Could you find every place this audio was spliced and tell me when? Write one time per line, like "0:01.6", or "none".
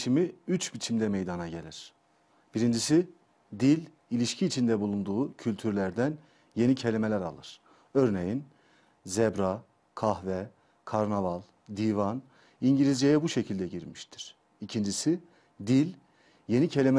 none